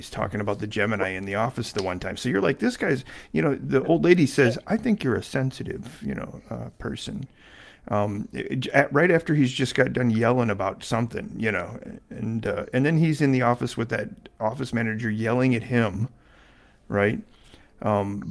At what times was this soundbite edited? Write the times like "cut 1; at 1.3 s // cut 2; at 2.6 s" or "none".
none